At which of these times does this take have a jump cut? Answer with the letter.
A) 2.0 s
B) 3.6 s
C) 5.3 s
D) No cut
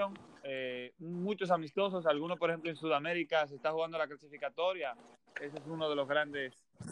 C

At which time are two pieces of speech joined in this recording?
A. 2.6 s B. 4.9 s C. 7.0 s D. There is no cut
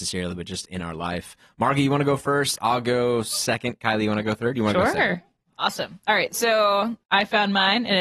C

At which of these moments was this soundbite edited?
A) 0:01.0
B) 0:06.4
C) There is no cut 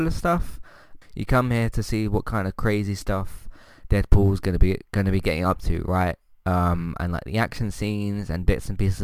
A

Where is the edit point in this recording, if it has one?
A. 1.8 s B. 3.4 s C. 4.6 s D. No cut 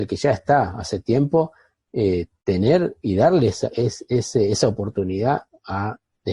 D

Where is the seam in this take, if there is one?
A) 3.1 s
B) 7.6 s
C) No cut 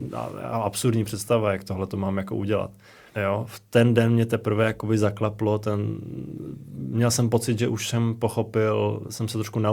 A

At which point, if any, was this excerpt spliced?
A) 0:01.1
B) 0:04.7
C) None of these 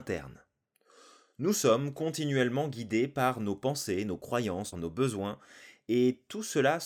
B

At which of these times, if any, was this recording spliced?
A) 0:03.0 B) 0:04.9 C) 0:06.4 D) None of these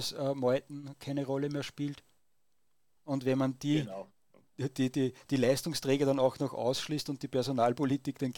A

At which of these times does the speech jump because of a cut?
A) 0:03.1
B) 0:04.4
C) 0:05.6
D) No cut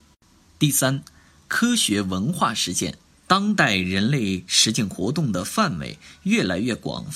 A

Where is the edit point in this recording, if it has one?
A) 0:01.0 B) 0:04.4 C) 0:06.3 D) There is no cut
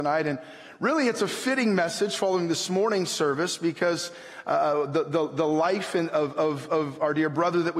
D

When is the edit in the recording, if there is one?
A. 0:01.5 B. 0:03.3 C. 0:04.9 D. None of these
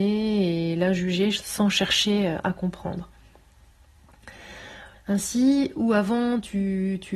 C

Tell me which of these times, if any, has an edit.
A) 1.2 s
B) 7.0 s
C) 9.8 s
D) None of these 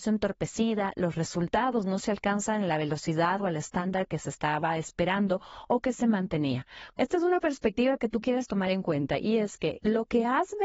B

